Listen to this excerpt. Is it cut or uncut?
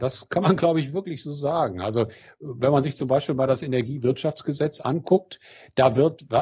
uncut